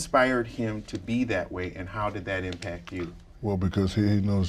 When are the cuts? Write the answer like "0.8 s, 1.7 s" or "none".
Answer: none